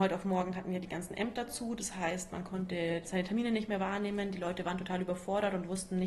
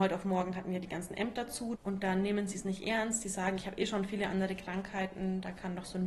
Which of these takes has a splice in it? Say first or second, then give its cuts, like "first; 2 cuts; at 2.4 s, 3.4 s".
second; 1 cut; at 1.7 s